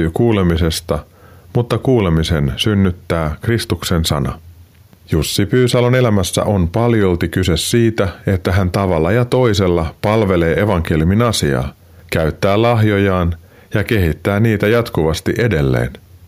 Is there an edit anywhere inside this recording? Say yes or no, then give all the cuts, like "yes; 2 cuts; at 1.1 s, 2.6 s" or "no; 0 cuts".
no; 0 cuts